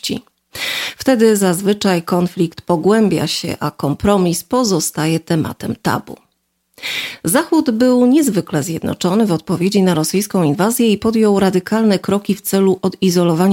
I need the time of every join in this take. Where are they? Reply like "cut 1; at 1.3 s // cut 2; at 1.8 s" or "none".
none

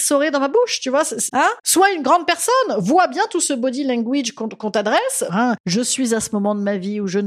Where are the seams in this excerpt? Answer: cut 1; at 5.3 s

